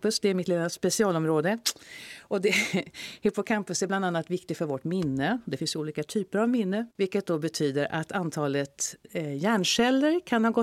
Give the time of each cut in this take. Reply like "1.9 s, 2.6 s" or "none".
6.9 s, 9.0 s